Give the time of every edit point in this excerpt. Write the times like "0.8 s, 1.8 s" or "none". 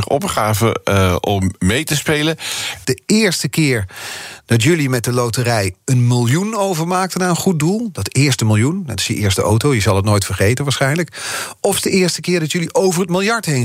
2.8 s